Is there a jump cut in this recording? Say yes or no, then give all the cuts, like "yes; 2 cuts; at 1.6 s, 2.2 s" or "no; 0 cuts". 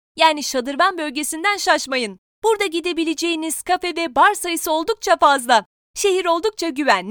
yes; 1 cut; at 5.8 s